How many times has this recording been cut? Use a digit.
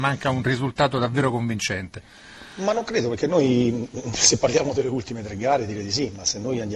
0